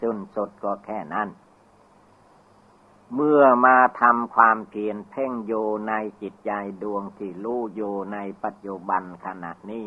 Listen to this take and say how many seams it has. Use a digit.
0